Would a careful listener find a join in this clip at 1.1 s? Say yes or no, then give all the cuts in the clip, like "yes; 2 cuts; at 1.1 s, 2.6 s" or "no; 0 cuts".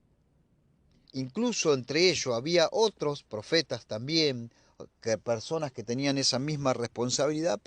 yes; 1 cut; at 1.1 s